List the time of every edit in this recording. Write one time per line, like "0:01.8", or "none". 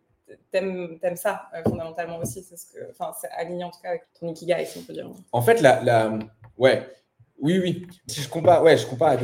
0:04.0
0:08.1